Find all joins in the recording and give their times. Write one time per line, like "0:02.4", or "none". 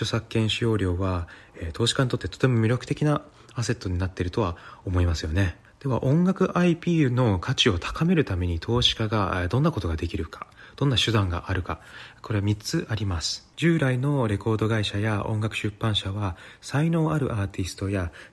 0:13.5

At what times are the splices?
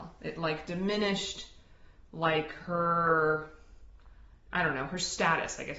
none

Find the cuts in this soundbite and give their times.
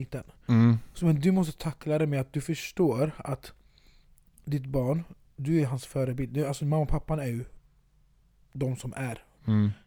none

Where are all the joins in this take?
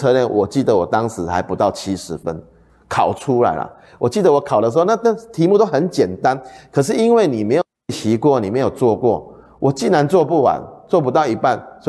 none

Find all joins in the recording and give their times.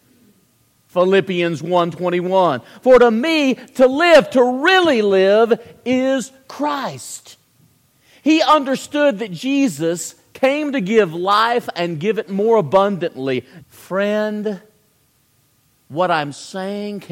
0:13.6

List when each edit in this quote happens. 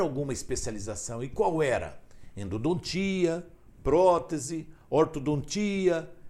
none

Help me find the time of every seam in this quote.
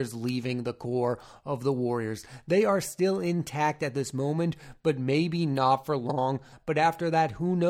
0:06.5

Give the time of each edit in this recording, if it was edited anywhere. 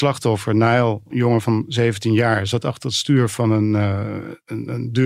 none

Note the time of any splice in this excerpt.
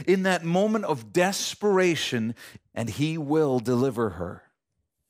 0:02.6

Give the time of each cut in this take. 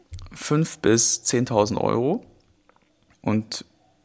0:03.1

